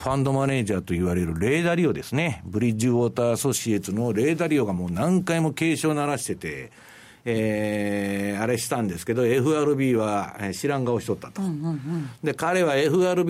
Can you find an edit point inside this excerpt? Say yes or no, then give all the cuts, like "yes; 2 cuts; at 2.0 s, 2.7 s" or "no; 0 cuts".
no; 0 cuts